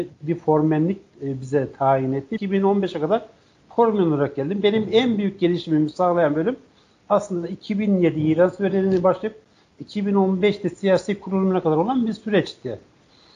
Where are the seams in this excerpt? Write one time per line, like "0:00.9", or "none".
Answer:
0:02.4